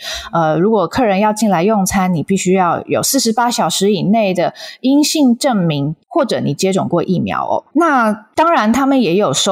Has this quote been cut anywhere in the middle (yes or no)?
yes